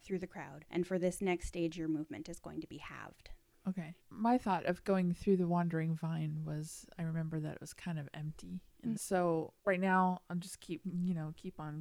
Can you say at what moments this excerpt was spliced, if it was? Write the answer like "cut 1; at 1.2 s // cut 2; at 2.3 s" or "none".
cut 1; at 4.0 s // cut 2; at 9.0 s